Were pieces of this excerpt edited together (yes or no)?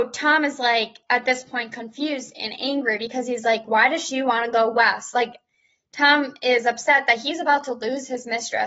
no